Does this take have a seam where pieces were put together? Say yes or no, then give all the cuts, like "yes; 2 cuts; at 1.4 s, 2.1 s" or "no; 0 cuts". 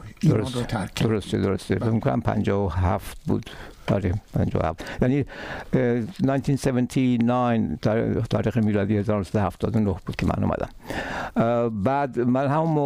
no; 0 cuts